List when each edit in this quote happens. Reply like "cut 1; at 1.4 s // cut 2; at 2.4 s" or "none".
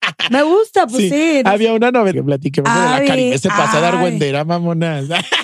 cut 1; at 2.1 s